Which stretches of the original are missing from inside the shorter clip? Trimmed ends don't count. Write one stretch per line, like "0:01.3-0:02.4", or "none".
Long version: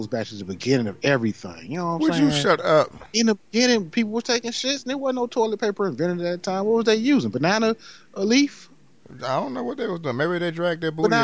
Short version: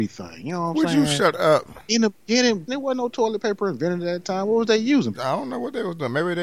0:03.9-0:04.8
0:07.3-0:09.2